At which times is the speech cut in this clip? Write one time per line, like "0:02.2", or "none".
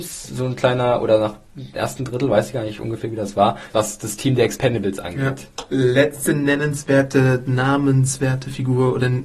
0:03.7
0:05.7